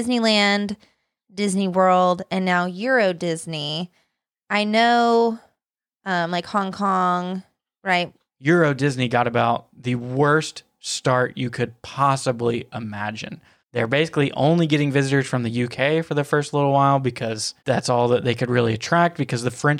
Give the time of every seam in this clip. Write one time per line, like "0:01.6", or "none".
0:08.3
0:13.6
0:17.6